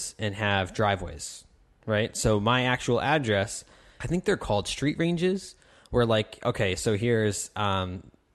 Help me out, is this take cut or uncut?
cut